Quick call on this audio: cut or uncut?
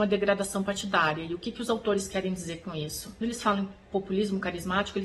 uncut